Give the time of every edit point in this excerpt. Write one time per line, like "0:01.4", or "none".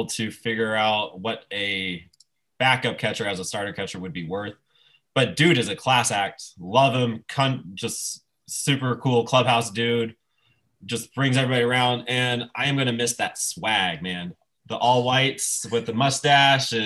none